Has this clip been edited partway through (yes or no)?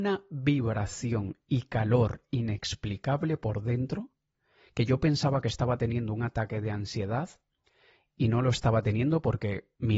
no